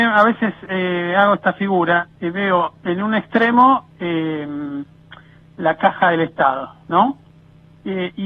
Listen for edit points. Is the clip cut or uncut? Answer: uncut